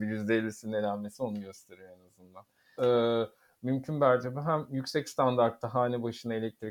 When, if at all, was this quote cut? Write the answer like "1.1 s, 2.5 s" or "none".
2.8 s